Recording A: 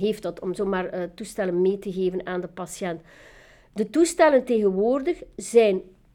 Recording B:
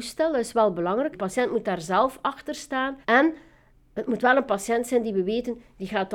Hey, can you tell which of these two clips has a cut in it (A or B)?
B